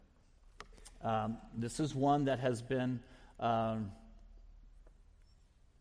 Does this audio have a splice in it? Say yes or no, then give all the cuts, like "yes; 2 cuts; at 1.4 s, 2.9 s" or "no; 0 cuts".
no; 0 cuts